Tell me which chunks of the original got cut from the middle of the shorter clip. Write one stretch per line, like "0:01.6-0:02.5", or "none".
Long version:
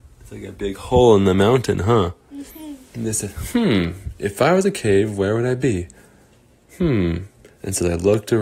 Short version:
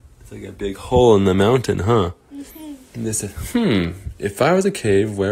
none